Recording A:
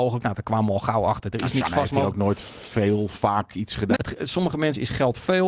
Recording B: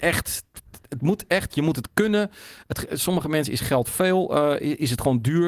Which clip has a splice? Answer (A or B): A